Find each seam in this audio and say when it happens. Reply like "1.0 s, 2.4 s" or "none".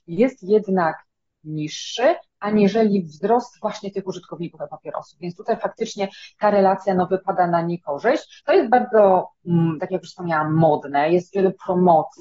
8.4 s

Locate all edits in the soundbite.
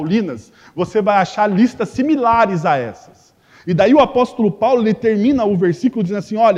none

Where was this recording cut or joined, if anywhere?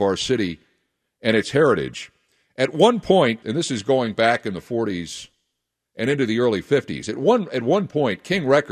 3.4 s

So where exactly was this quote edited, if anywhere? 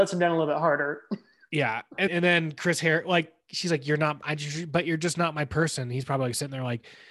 2.1 s

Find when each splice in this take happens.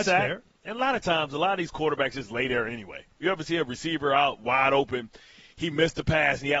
3.2 s

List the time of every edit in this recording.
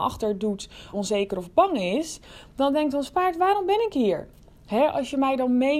0.9 s

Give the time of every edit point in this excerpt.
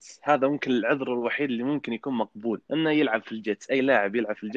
2.6 s

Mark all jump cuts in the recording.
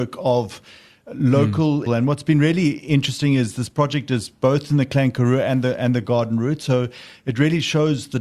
1.9 s

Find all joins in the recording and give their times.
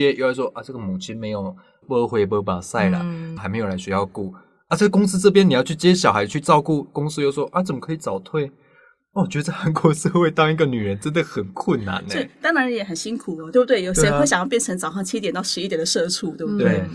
1.8 s, 3.4 s

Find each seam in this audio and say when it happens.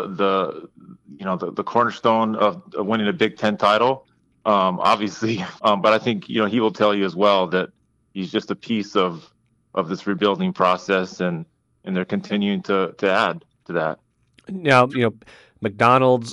5.6 s, 14.9 s

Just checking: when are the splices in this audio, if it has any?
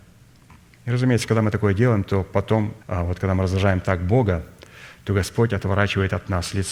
2.8 s

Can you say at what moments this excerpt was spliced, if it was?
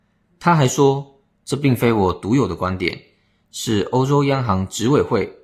none

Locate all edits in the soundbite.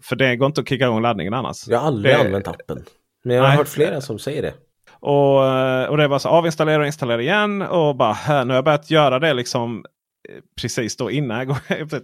4.9 s

